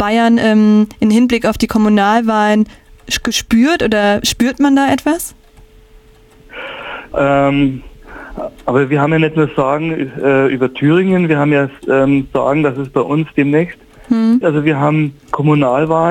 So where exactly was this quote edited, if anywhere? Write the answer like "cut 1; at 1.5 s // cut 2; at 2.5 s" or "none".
cut 1; at 7.1 s // cut 2; at 14.4 s